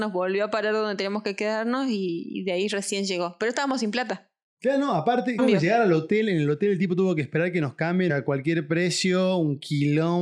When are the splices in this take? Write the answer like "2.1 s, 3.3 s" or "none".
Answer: 5.4 s, 8.1 s